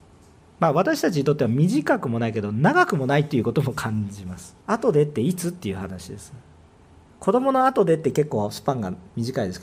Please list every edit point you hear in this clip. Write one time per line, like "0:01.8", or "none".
0:04.6